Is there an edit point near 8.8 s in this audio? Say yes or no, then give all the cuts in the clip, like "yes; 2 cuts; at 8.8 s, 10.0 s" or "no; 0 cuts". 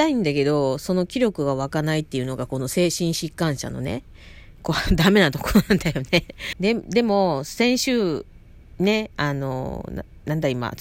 no; 1 cut; at 6.5 s